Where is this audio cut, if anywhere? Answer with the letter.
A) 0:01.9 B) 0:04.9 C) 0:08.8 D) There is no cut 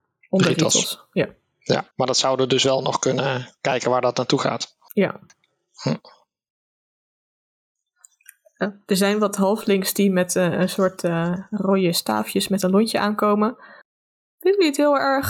A